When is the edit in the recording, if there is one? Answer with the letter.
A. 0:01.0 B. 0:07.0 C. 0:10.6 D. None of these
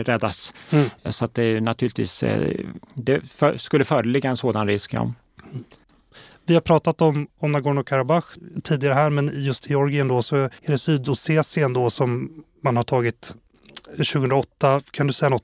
C